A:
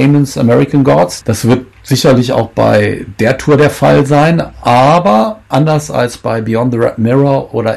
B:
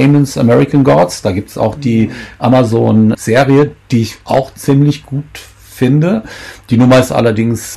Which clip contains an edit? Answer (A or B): A